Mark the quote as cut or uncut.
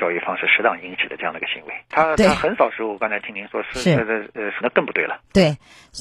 cut